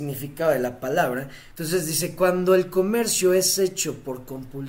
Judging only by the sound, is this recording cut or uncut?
cut